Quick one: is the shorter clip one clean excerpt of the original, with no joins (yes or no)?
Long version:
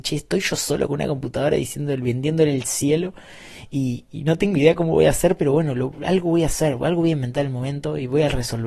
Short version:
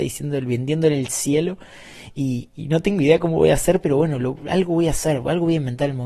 yes